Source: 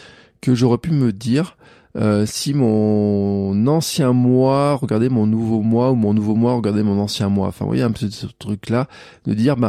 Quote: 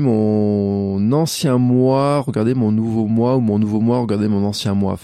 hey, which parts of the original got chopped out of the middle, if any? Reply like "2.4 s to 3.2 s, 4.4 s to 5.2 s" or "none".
none